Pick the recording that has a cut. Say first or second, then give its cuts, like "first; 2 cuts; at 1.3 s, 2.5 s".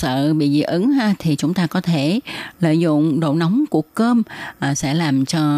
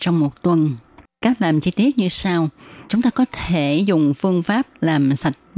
second; 1 cut; at 2.9 s